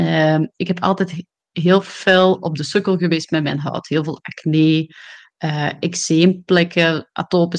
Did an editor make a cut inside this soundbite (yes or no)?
no